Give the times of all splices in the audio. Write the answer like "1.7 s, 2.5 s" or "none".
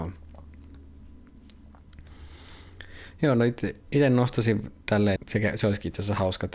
5.2 s